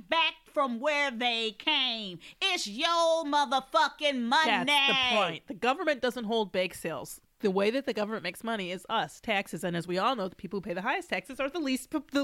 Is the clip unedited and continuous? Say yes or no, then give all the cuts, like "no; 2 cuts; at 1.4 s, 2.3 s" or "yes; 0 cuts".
no; 1 cut; at 7.3 s